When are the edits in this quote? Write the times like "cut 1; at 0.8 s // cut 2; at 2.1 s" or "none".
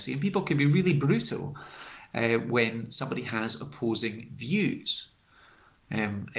none